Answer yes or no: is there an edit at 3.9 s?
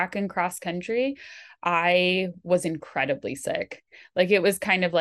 no